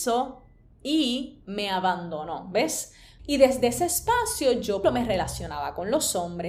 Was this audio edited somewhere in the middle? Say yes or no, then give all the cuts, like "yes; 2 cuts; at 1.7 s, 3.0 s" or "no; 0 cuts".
yes; 2 cuts; at 3.2 s, 4.8 s